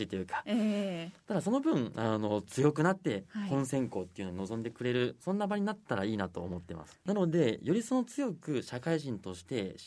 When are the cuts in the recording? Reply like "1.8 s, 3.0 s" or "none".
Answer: 1.2 s